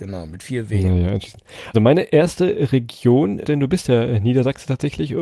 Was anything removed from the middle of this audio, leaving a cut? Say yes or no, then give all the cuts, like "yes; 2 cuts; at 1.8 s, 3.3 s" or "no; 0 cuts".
yes; 2 cuts; at 1.7 s, 3.4 s